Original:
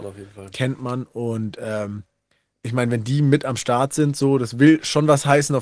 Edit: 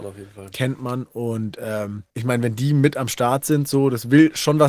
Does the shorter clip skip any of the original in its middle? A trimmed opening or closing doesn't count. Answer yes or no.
yes